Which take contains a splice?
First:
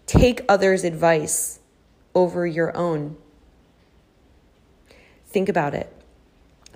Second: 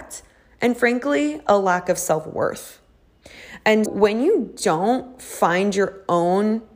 second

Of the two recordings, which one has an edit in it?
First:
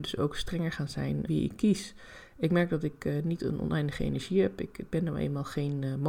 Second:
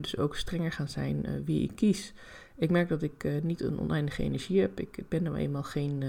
first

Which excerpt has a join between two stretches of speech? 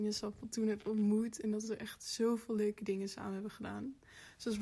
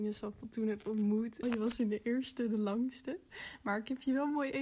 second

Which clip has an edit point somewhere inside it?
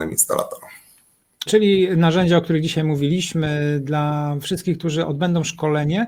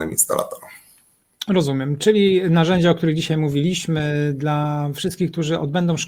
first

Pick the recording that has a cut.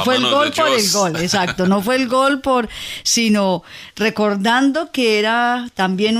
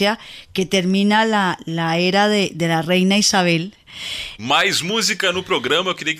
second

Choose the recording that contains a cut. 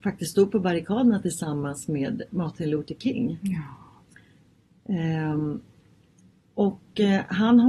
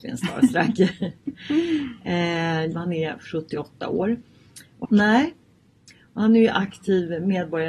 second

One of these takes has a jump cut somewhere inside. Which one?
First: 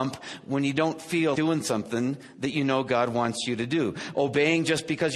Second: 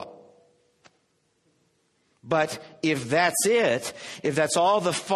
first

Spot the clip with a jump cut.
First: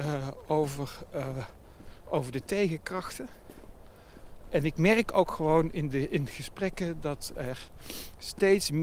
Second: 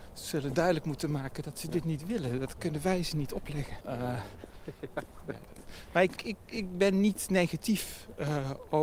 second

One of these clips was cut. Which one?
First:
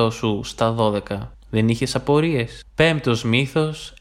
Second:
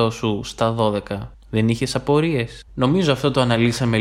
second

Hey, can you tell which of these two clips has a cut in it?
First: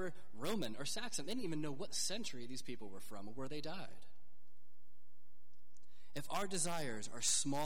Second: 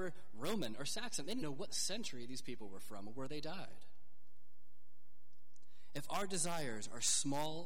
second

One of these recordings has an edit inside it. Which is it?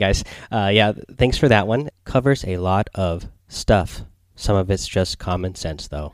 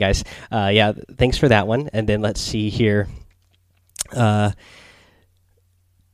first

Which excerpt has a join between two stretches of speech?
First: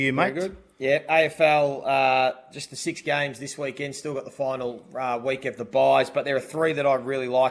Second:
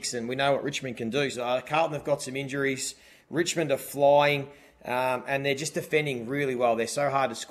second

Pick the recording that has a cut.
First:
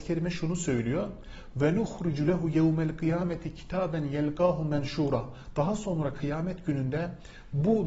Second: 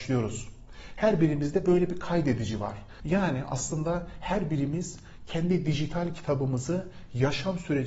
second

